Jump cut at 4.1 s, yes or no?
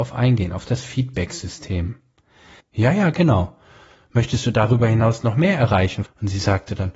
no